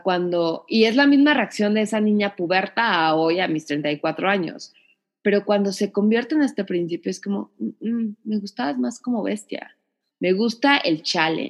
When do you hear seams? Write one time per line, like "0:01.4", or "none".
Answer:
0:10.1